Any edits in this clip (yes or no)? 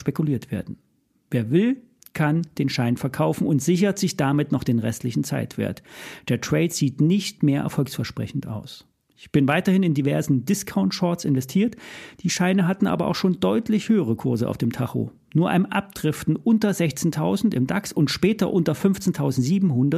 no